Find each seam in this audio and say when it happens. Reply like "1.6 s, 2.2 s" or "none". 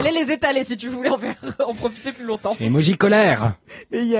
none